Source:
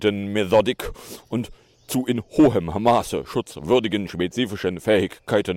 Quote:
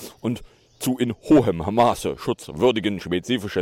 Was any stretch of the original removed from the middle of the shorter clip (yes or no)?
no